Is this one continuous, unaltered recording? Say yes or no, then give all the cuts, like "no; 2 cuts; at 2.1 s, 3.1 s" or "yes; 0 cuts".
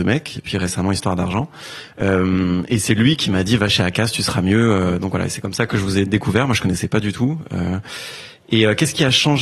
yes; 0 cuts